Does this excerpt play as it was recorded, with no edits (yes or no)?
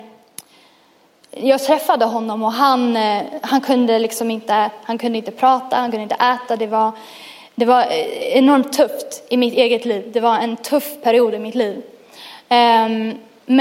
yes